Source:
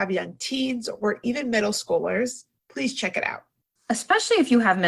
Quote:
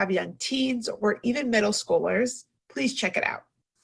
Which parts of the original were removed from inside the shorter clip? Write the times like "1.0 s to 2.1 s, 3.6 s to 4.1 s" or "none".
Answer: none